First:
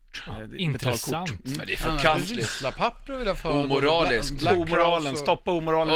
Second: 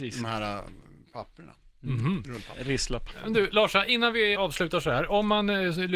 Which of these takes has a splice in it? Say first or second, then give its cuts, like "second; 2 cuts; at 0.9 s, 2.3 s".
second; 1 cut; at 4.3 s